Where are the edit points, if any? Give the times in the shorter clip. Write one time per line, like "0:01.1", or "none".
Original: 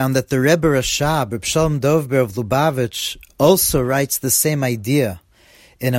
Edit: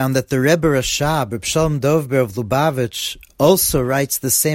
none